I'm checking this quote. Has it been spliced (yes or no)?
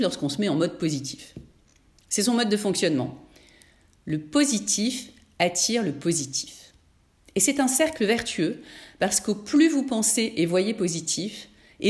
no